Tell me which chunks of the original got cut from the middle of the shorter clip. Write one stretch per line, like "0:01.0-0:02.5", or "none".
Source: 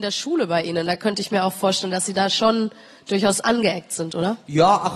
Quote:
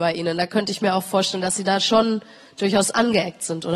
none